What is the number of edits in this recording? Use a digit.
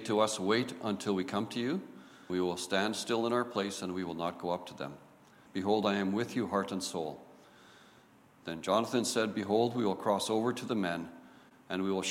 2